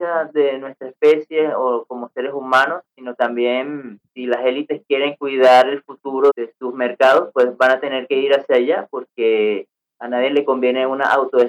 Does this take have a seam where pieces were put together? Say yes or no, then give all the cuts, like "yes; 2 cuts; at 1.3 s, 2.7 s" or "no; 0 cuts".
yes; 2 cuts; at 4.1 s, 6.3 s